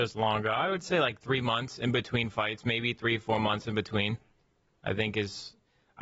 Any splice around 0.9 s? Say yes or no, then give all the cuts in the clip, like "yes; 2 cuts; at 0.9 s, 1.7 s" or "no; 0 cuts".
no; 0 cuts